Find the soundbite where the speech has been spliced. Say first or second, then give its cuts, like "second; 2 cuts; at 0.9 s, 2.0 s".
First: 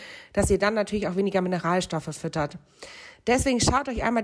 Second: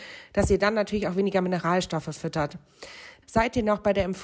second; 1 cut; at 3.2 s